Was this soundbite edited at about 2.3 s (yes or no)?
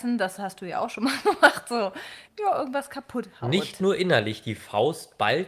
yes